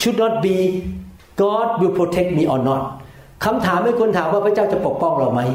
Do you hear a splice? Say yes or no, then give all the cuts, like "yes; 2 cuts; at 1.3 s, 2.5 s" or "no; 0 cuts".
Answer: no; 0 cuts